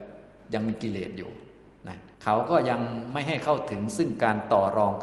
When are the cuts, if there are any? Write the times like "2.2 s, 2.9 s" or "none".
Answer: 2.1 s